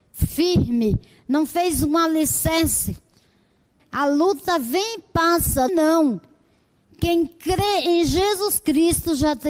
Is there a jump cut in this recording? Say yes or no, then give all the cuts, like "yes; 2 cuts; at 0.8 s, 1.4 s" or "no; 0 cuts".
yes; 2 cuts; at 3.8 s, 5.7 s